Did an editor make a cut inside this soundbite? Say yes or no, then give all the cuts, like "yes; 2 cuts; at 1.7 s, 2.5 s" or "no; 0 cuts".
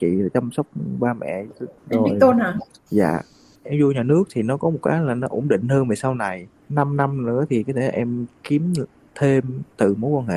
no; 0 cuts